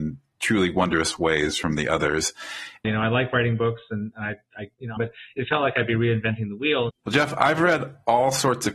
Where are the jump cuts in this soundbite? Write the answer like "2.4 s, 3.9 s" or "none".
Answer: 2.8 s, 5.0 s, 6.9 s